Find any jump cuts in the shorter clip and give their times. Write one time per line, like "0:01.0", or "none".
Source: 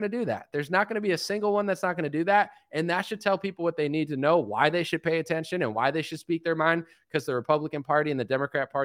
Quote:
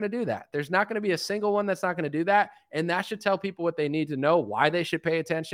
none